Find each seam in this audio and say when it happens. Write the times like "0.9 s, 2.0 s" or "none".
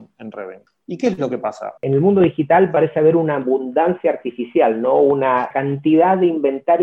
1.8 s

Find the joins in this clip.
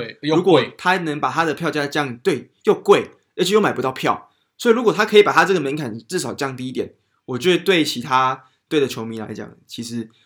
none

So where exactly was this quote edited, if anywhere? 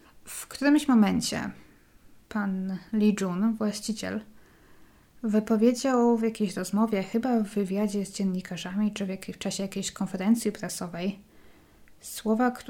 none

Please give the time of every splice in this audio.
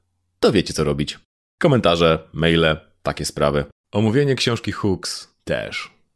3.8 s

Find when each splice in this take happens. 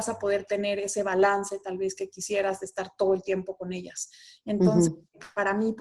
none

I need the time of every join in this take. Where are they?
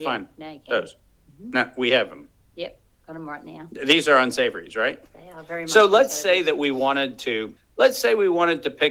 7.6 s

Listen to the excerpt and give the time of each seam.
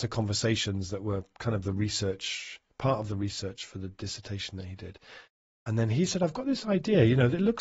none

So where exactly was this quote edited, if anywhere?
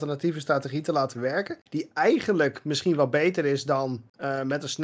none

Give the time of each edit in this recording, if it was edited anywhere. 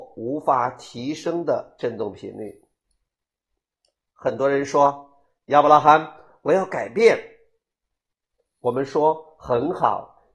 none

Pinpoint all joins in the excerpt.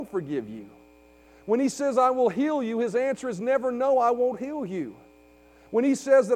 none

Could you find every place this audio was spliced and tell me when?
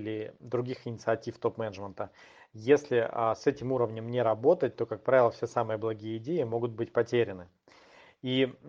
none

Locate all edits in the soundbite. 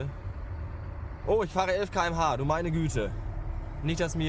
1.2 s

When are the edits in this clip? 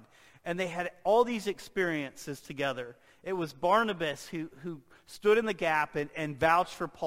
none

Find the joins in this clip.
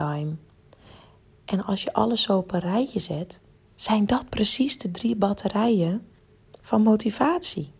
none

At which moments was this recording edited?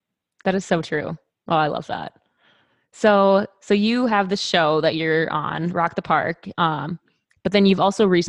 none

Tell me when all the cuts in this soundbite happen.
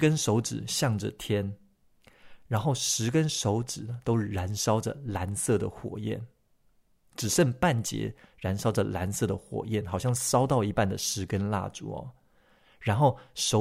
none

